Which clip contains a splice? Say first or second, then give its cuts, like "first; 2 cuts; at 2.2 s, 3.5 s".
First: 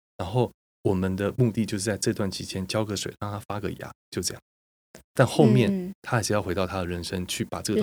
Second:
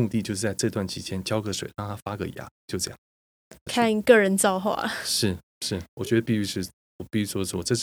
second; 1 cut; at 3.7 s